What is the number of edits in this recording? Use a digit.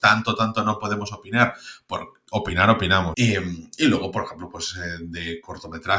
1